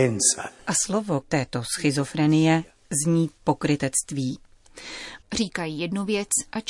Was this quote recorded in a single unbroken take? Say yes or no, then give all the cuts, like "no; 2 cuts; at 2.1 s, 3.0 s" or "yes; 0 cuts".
no; 2 cuts; at 1.2 s, 5.2 s